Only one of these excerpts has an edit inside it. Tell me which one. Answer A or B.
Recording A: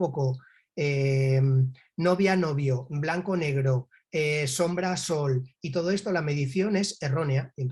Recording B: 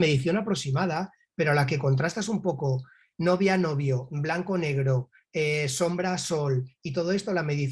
B